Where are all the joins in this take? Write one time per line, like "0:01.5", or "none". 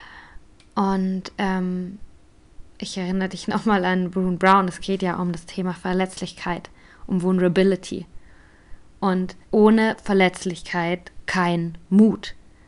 0:09.4

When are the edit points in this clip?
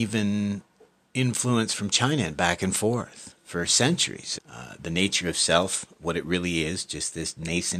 0:04.4

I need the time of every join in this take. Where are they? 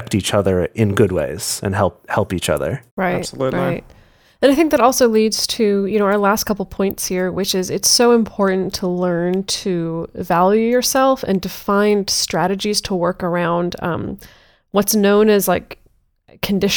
0:02.9

